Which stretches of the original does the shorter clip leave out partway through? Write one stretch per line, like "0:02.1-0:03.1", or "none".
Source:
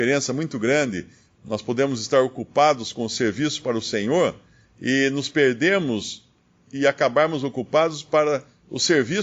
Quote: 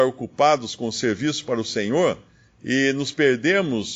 none